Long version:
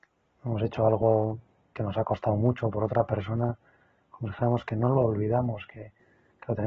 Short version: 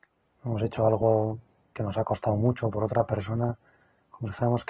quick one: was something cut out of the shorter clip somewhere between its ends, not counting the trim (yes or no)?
no